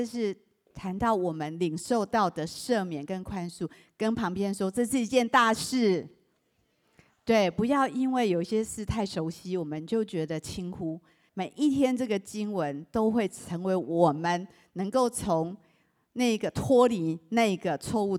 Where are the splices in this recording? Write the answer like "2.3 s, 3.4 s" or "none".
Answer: 11.3 s